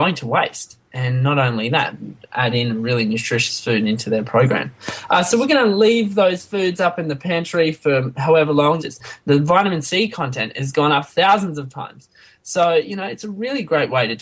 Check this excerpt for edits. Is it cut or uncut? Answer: cut